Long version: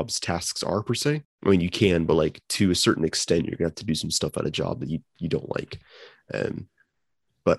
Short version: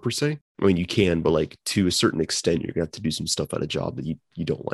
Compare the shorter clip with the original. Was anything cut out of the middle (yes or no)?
no